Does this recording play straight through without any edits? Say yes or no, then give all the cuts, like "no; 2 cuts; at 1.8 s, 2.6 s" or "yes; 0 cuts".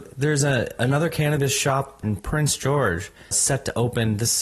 no; 2 cuts; at 2.0 s, 3.3 s